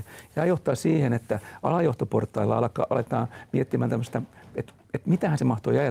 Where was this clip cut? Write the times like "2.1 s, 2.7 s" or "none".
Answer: none